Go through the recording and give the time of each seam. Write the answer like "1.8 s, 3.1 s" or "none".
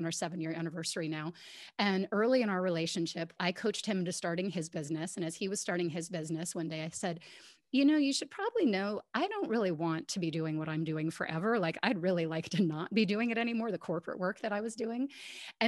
3.4 s